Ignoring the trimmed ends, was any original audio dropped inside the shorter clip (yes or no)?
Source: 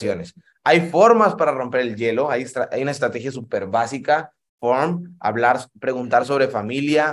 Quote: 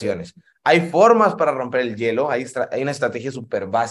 no